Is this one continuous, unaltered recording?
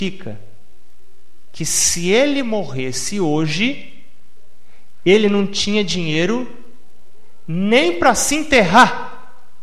yes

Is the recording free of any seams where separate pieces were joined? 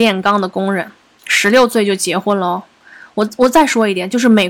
yes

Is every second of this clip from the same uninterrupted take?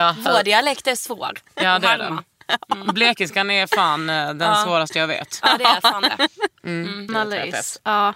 no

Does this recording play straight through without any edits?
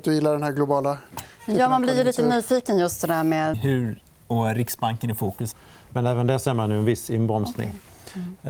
no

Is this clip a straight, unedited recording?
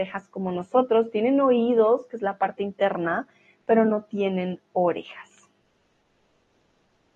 yes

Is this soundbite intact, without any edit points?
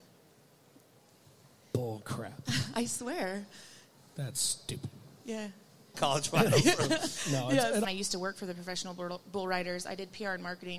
no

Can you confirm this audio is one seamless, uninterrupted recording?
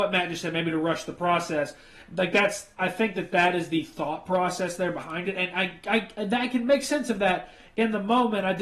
yes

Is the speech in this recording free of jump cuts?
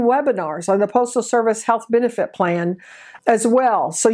no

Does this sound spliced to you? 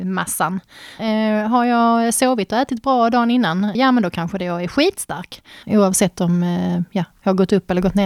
yes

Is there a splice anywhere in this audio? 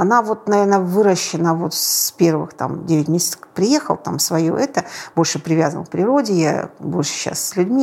no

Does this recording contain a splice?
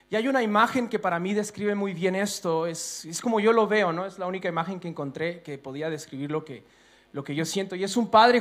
no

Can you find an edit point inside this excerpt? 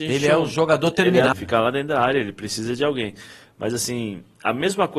yes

